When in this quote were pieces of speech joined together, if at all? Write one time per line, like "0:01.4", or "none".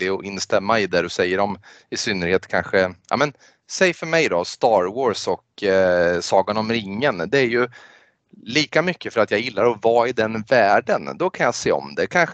none